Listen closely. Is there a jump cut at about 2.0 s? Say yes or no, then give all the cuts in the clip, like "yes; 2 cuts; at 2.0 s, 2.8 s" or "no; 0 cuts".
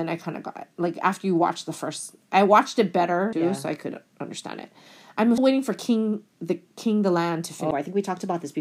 no; 3 cuts; at 3.3 s, 5.4 s, 7.7 s